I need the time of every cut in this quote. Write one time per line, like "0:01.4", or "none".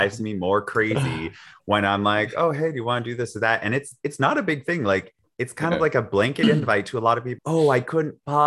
0:07.4

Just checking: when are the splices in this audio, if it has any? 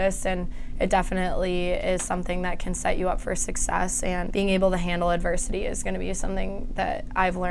0:04.3

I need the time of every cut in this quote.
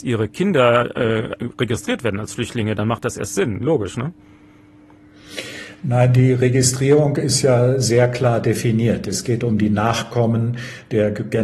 none

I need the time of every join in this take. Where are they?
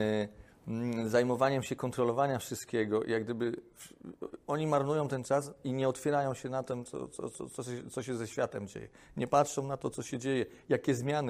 none

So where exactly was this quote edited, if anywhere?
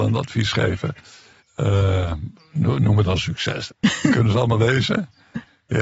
0:01.4
0:03.7

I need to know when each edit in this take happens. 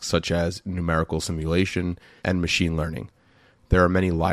0:02.2

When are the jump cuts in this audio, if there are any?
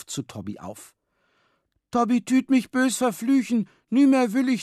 none

